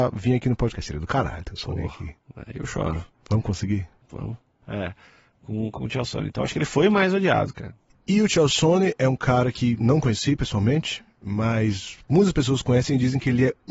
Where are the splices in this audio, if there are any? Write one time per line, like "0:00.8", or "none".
0:04.6